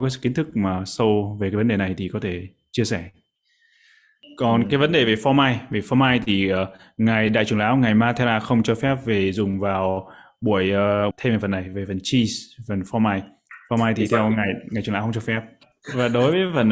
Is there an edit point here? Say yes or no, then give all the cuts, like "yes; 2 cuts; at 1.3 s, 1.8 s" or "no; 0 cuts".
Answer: yes; 1 cut; at 11.1 s